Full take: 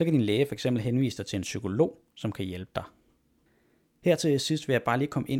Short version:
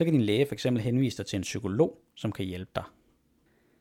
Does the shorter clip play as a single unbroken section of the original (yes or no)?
yes